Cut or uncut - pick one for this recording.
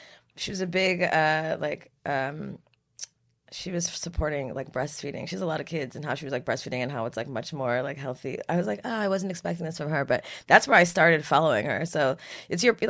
uncut